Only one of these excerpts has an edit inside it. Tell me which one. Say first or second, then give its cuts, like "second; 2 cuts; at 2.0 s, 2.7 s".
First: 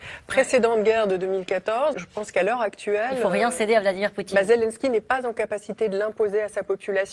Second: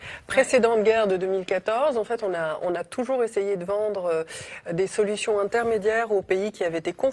first; 1 cut; at 1.9 s